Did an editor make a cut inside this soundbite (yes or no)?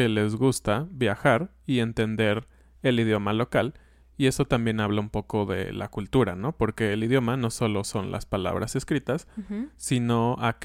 no